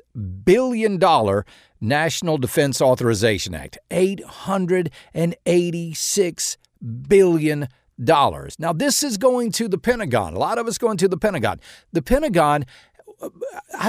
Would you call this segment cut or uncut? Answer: uncut